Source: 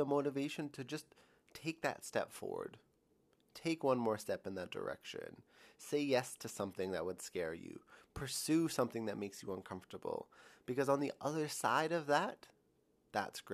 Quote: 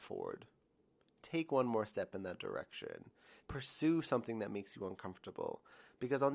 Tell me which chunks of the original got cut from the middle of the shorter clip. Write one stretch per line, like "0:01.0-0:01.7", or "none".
0:05.7-0:08.1